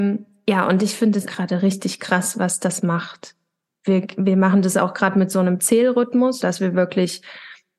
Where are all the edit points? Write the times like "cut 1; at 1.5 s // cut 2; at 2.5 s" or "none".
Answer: cut 1; at 1.3 s // cut 2; at 6.4 s